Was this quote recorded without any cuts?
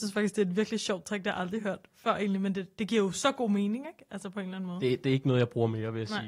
yes; 0 cuts

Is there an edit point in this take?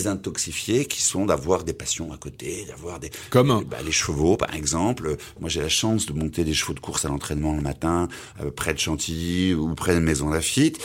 no; 0 cuts

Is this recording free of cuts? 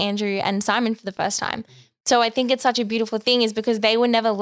yes; 0 cuts

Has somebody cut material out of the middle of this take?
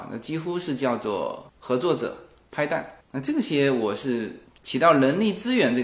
no; 0 cuts

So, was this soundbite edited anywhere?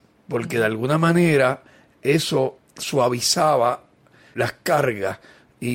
no; 0 cuts

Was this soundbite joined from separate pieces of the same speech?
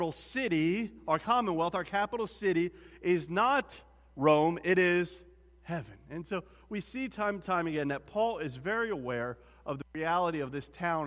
no; 0 cuts

